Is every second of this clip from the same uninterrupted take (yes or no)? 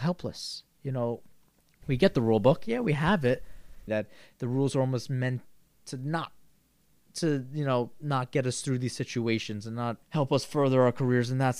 no